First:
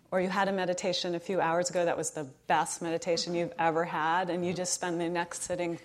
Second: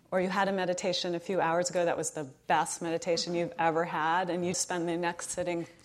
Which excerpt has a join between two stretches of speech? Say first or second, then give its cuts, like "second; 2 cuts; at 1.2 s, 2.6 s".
second; 1 cut; at 4.5 s